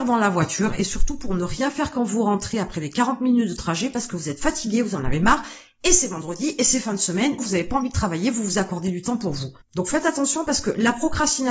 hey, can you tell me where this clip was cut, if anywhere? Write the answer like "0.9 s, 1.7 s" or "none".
7.4 s, 9.6 s